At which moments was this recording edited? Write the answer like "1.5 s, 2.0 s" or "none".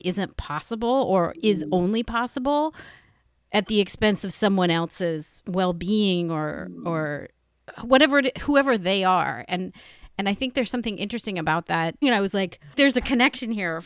12.0 s